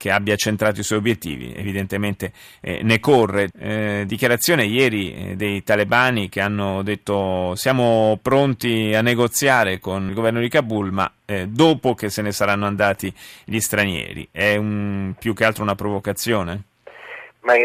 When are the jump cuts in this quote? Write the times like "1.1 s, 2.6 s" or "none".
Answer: 3.5 s, 10.1 s